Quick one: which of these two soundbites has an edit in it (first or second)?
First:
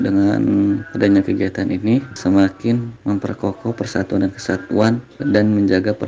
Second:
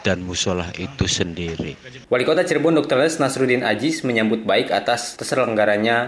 second